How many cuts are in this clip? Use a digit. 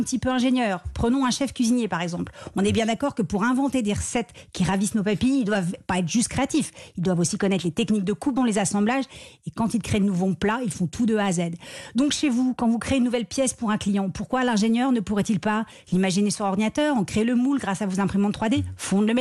1